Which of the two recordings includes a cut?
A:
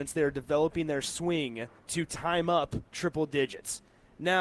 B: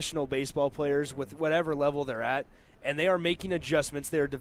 A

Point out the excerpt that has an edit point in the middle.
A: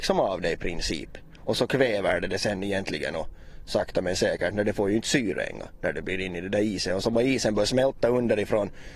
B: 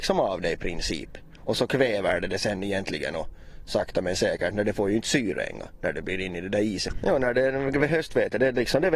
B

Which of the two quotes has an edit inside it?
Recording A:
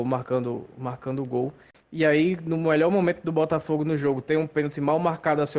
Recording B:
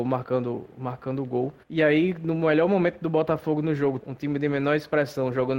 B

